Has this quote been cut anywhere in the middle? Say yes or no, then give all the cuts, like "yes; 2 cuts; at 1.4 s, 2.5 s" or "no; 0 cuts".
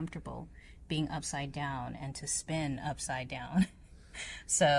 no; 0 cuts